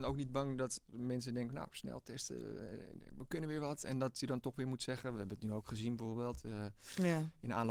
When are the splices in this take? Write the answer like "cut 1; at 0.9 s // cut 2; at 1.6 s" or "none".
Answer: none